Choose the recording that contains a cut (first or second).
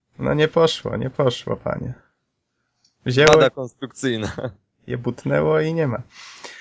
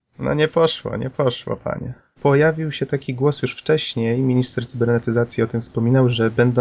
second